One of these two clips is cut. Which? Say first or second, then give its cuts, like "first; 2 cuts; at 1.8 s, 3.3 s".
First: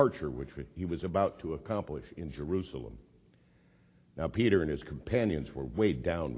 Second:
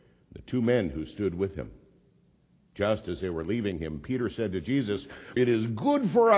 second; 1 cut; at 5.4 s